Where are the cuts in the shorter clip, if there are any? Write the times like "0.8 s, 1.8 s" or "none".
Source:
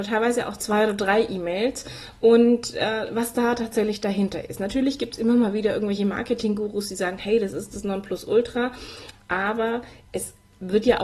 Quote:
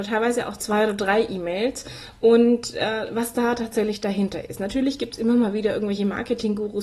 none